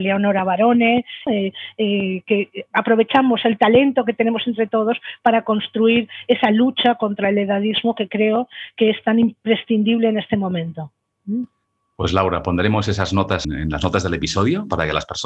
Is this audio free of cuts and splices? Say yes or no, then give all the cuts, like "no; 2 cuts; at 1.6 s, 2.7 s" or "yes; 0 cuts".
no; 2 cuts; at 1.3 s, 13.4 s